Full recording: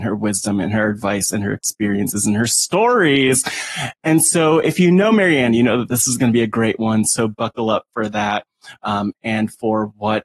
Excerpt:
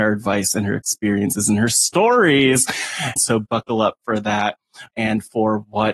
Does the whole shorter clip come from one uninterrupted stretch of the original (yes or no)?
no